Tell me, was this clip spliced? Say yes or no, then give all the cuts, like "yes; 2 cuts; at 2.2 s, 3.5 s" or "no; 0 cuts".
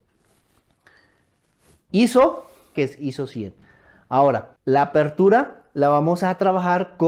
yes; 2 cuts; at 2.8 s, 4.6 s